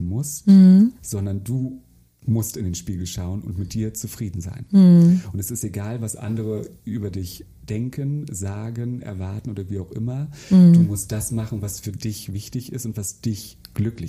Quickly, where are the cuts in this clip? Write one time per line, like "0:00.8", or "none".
none